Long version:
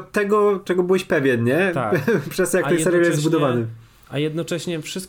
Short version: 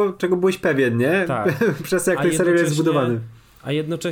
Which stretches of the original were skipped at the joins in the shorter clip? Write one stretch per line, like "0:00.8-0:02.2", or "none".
none